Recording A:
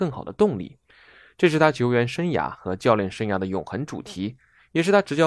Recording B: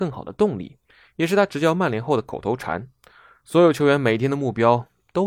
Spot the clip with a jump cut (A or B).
B